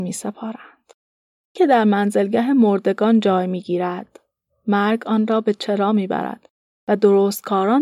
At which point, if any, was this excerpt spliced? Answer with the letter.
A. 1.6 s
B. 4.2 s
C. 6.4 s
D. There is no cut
A